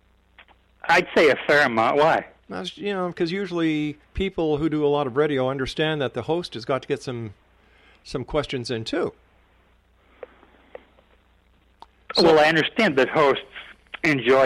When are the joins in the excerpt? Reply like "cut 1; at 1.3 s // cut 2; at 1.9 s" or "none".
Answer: cut 1; at 4.0 s